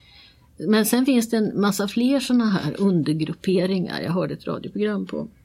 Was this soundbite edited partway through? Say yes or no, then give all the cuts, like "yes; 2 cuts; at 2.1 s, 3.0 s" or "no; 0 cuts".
no; 0 cuts